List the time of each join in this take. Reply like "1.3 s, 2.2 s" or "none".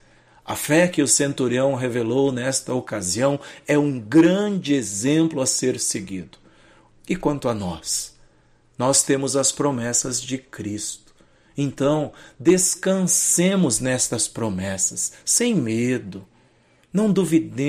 6.9 s